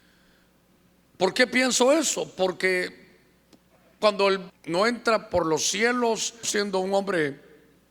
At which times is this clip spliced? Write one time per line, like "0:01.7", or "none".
0:04.5
0:06.4